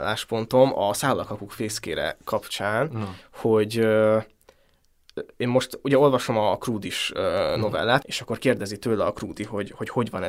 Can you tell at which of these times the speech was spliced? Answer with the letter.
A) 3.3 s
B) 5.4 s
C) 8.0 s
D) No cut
C